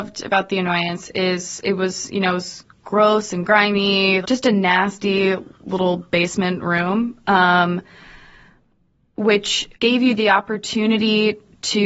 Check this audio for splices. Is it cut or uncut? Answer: cut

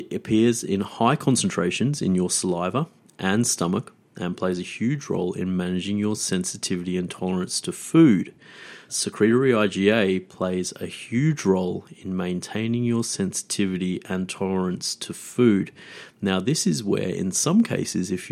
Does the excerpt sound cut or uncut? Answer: cut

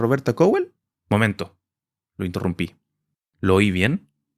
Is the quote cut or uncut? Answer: cut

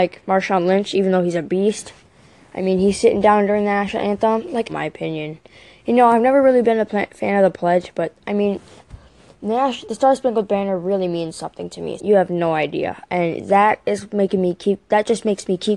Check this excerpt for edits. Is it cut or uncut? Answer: cut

